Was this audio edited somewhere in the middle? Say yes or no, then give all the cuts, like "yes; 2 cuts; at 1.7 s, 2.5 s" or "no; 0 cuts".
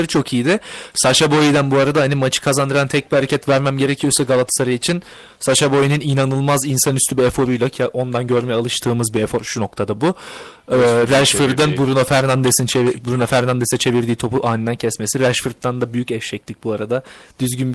no; 0 cuts